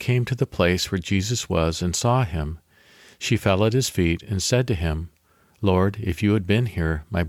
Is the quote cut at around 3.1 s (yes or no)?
no